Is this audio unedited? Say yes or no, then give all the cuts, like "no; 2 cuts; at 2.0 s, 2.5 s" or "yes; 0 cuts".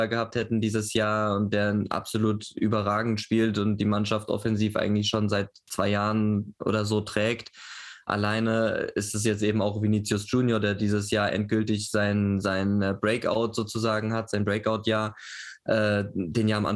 yes; 0 cuts